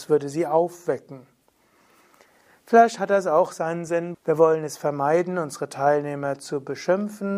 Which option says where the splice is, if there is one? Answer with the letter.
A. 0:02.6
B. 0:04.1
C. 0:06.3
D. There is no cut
B